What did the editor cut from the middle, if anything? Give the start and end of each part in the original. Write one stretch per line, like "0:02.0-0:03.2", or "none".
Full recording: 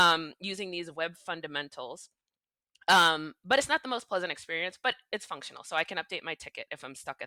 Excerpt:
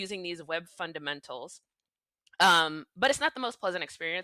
none